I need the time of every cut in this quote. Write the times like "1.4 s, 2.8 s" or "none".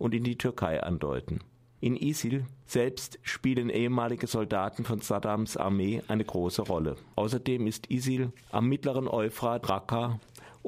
7.1 s, 9.6 s

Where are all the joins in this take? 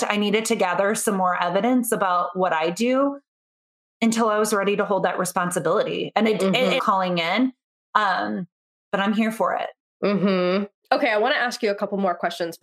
6.8 s

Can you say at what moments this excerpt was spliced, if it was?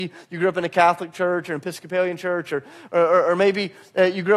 none

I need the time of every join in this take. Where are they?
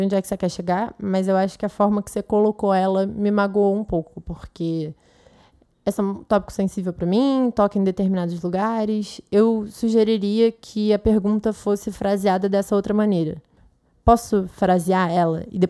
none

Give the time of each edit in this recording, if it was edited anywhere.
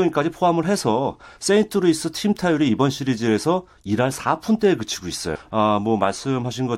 5.4 s

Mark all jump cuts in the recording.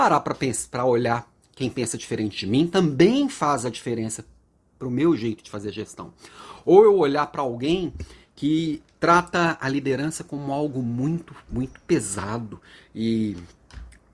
none

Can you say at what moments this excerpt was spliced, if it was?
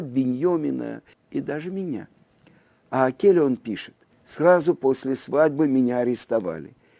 1.1 s, 4.1 s

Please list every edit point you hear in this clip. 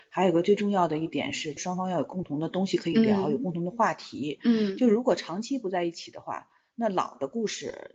none

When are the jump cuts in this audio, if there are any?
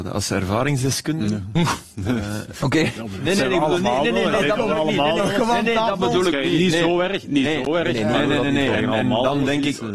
none

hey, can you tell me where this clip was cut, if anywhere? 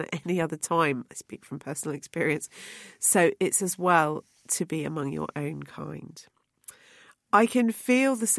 none

